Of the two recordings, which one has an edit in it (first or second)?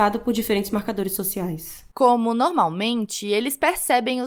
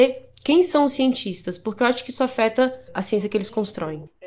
second